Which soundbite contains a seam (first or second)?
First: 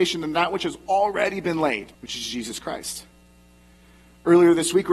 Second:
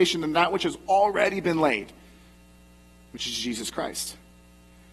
first